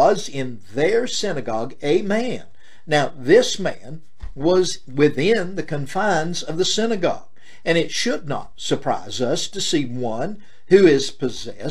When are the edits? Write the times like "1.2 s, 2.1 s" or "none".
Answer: none